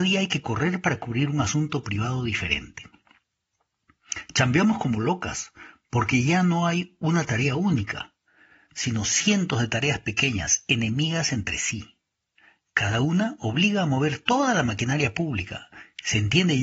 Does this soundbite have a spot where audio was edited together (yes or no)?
no